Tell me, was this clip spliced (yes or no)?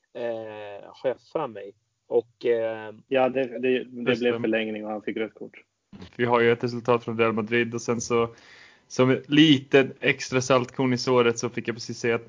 yes